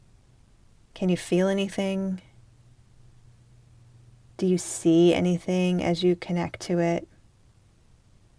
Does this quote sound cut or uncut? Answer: uncut